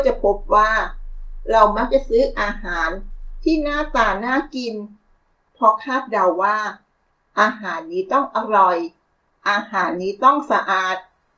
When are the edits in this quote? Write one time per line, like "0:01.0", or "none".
none